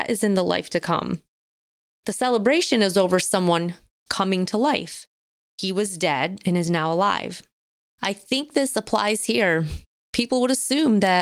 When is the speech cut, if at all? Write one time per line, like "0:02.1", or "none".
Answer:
0:07.8

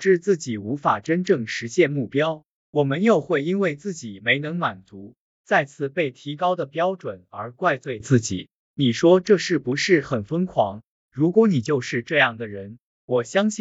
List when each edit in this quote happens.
none

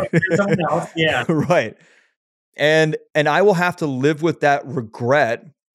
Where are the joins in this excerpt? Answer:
0:03.1

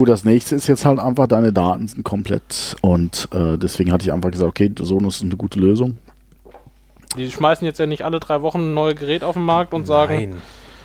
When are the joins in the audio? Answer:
0:02.8
0:07.1

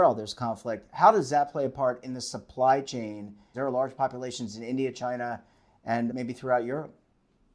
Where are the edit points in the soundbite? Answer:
0:03.5
0:06.1

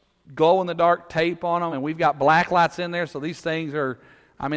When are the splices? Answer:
none

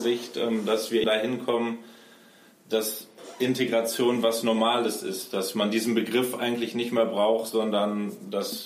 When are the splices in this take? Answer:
0:01.0

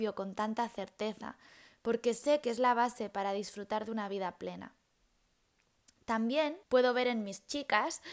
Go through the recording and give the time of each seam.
0:06.6

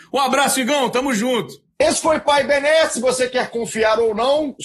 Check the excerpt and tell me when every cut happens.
0:01.7

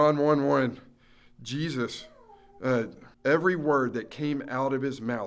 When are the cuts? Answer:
0:03.1

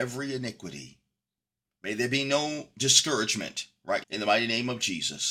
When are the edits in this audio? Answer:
0:01.7
0:04.0

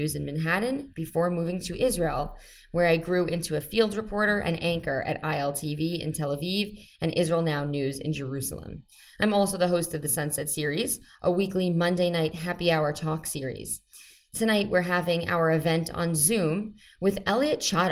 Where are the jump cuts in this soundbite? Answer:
none

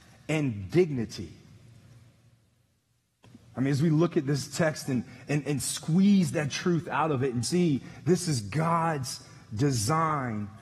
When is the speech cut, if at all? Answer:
0:03.5
0:07.4

